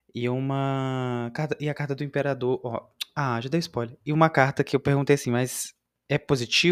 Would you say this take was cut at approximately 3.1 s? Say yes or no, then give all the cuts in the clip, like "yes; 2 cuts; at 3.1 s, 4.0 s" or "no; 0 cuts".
no; 0 cuts